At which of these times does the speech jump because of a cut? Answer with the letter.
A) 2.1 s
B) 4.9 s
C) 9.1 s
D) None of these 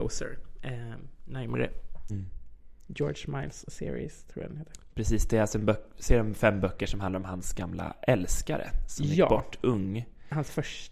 A